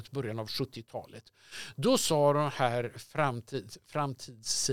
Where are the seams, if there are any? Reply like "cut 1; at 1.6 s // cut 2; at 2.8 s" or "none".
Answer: none